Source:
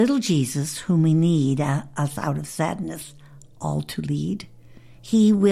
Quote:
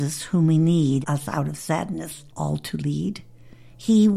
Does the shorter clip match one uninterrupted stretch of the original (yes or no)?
no